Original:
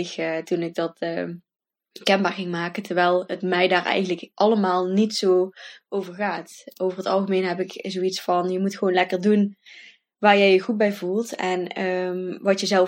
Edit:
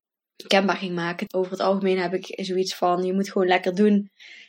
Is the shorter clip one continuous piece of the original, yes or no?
no